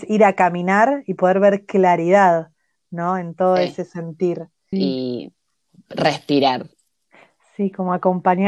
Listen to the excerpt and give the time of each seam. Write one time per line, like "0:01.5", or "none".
0:04.7